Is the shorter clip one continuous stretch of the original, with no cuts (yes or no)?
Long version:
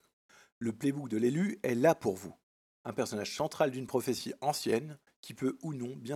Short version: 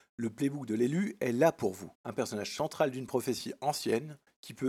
no